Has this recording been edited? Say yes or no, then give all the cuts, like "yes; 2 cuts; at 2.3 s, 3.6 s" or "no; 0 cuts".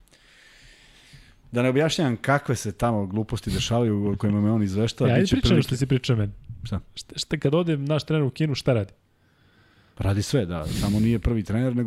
no; 0 cuts